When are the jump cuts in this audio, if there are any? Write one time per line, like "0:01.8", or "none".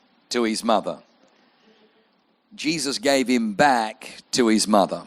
none